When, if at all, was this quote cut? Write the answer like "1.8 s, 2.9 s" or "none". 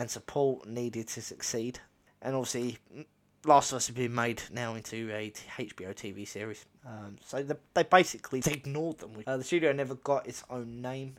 2.1 s, 6.8 s, 8.4 s

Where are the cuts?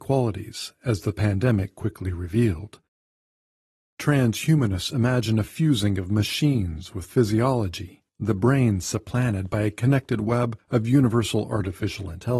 3.8 s, 8.1 s

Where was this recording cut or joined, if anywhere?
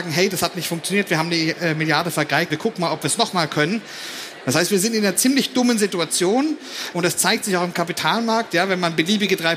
2.5 s, 4.4 s, 6.9 s

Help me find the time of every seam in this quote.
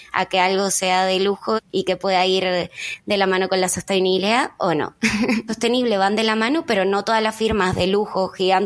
1.6 s, 5.5 s

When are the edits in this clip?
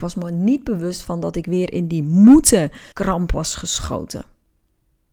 2.9 s

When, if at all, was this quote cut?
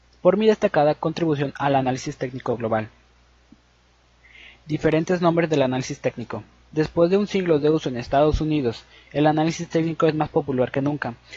none

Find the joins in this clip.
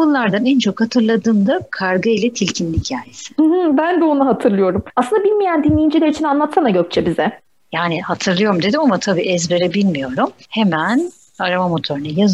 none

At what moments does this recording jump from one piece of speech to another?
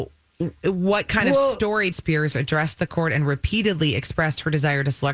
1.9 s

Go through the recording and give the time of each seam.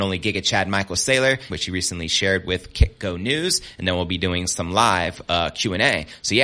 1.5 s

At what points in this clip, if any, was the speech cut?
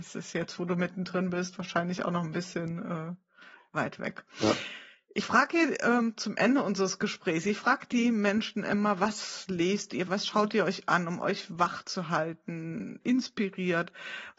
10.1 s, 13.0 s

